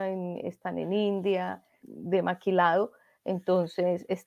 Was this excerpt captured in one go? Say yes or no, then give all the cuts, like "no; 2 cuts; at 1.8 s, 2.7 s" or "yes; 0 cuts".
no; 1 cut; at 1.8 s